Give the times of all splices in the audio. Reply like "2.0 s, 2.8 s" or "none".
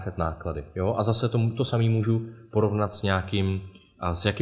none